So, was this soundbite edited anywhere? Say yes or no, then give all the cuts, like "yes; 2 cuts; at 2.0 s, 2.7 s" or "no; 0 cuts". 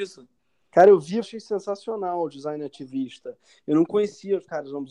yes; 1 cut; at 1.2 s